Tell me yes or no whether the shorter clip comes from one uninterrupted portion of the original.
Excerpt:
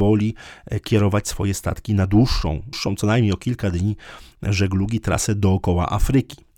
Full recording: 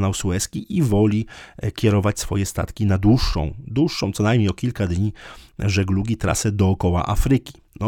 no